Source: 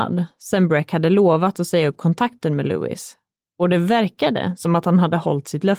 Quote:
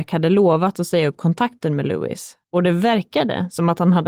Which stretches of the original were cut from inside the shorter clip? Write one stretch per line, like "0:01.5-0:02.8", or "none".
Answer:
0:03.2-0:03.5

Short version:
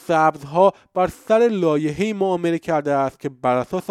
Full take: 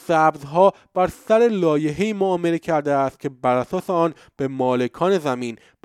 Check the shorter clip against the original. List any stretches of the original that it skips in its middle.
none

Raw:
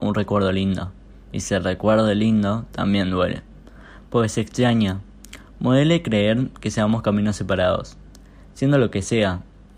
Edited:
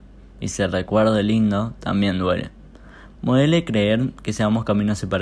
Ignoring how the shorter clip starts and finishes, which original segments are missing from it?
0:04.1-0:05.5

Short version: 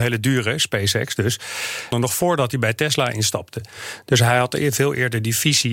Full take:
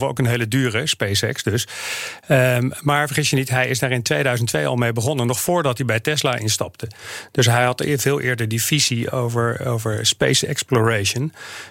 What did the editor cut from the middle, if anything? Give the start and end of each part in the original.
0:02.2-0:05.2

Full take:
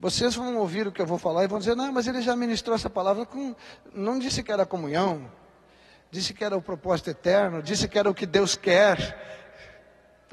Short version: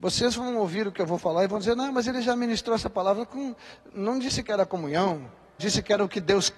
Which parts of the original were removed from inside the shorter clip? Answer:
0:05.6-0:07.6

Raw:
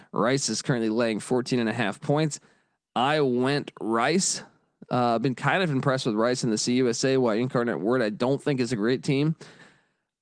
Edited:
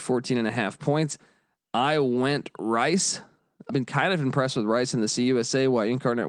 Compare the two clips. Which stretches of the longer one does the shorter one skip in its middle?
0:04.9-0:05.2

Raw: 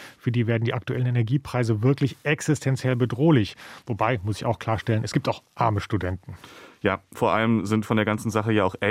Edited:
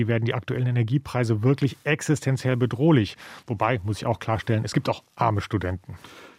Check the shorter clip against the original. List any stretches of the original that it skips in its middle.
none

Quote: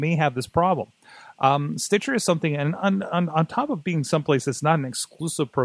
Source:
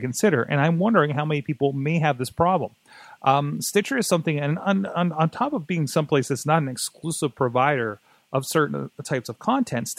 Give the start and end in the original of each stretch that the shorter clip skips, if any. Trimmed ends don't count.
none

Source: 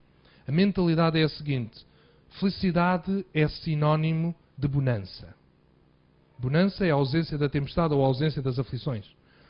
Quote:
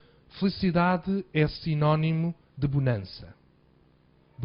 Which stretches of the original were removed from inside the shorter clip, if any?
none

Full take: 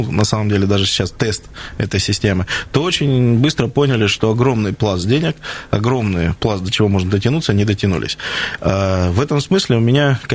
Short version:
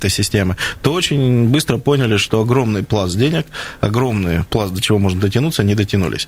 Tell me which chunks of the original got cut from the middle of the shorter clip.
none

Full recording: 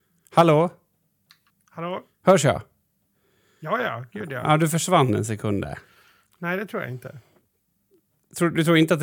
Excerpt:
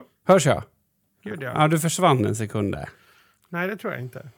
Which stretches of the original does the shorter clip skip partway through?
0:03.2-0:04.1

